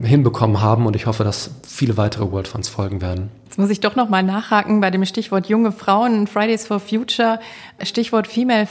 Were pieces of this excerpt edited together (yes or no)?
no